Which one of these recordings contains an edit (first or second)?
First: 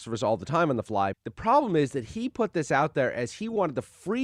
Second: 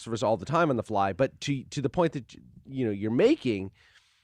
first